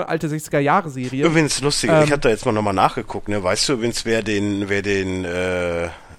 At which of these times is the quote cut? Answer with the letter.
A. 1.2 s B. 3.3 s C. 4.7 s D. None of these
D